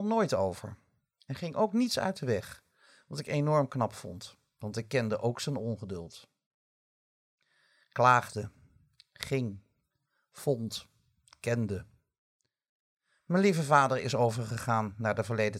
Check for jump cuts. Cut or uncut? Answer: uncut